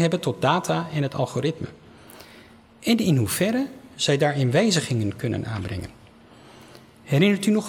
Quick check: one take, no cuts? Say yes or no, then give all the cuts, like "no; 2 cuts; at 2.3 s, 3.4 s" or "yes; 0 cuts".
yes; 0 cuts